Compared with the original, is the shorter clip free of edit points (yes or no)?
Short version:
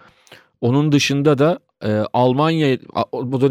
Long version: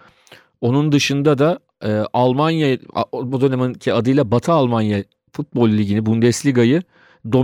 yes